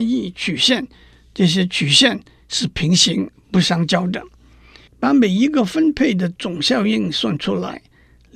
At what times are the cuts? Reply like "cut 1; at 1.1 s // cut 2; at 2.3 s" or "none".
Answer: cut 1; at 4.9 s